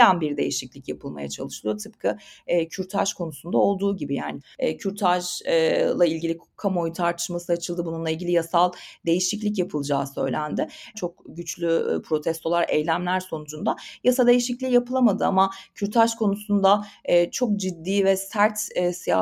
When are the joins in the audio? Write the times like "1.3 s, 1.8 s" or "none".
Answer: 10.9 s